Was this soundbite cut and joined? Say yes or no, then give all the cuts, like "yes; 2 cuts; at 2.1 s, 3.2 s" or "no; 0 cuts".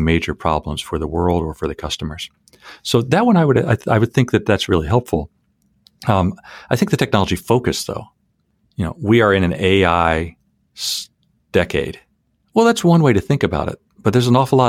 no; 0 cuts